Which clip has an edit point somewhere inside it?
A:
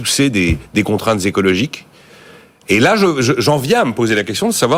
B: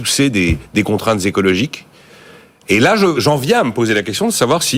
B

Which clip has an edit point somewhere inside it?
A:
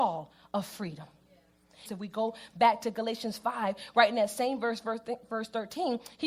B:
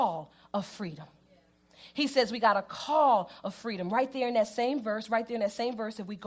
A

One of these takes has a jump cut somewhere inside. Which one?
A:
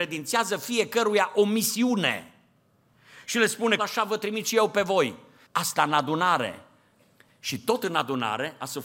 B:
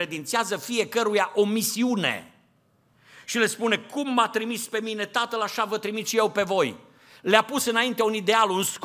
A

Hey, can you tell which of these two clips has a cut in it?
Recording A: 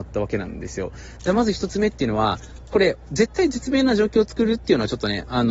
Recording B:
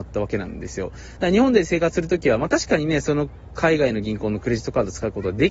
A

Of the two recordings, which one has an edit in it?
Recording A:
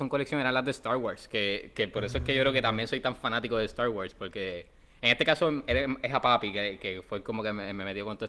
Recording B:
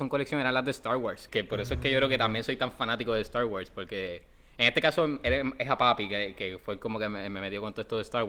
B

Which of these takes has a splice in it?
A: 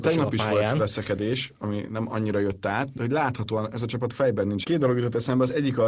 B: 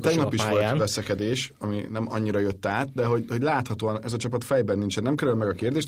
A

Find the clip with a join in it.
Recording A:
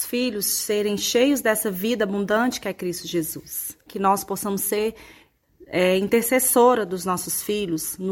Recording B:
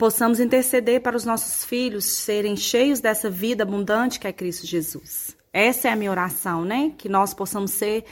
A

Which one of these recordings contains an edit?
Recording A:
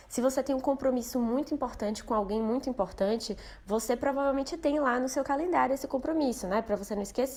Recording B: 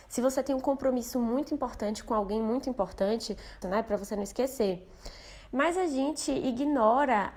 B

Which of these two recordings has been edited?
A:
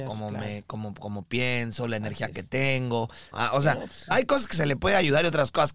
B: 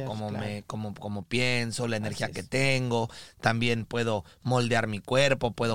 A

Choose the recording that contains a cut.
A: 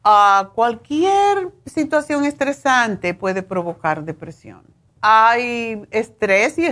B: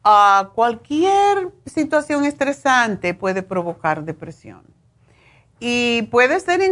A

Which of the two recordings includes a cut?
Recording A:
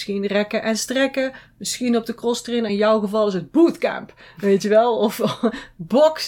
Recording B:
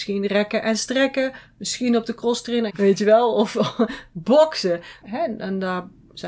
B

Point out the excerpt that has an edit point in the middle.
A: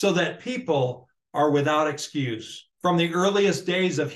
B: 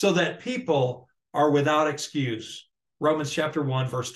A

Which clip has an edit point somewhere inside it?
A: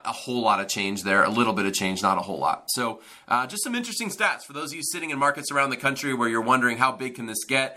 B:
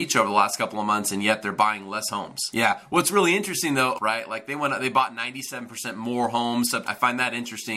B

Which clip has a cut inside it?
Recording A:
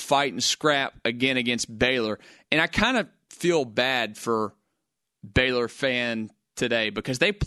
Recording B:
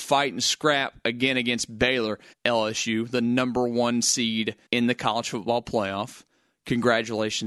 B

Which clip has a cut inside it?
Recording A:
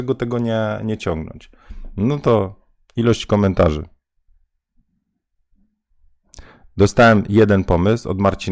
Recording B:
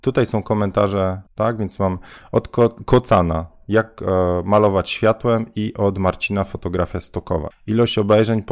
B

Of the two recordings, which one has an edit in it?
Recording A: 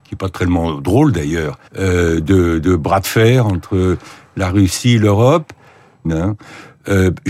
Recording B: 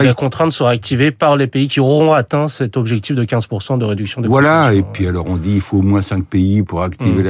A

